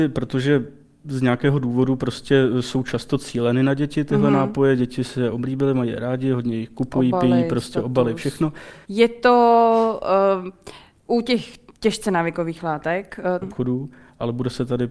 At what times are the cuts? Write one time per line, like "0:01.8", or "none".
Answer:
0:08.8
0:13.4